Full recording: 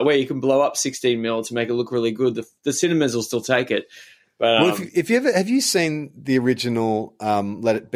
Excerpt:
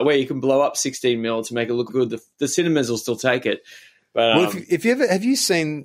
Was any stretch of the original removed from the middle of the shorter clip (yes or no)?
yes